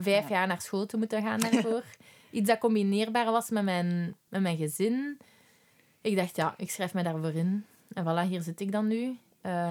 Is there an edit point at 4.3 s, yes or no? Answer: yes